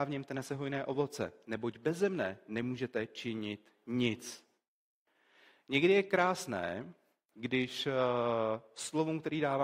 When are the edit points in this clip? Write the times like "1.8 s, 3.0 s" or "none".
none

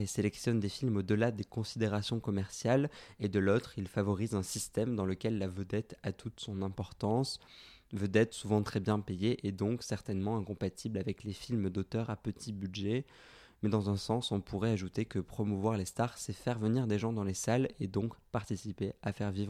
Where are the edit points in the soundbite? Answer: none

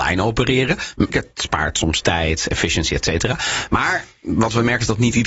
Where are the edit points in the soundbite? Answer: 1.1 s

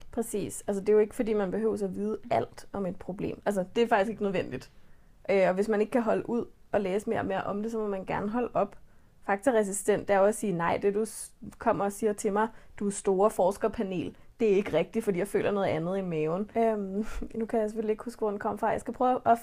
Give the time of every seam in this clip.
9.2 s, 16.5 s

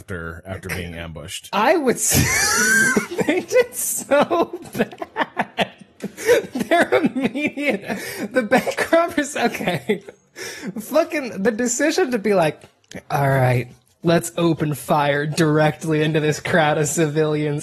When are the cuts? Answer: none

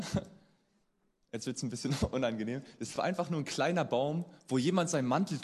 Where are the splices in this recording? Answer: none

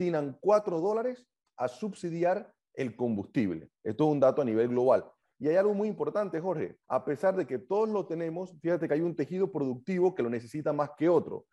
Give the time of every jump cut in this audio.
5.3 s, 6.8 s

